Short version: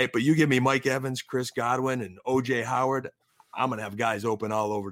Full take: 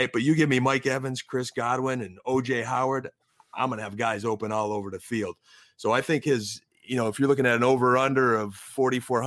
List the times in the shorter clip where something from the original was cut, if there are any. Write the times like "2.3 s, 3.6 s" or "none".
none